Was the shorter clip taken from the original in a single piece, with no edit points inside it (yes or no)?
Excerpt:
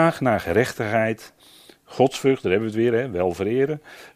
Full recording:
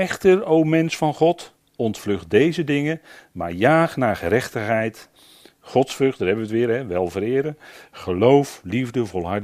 yes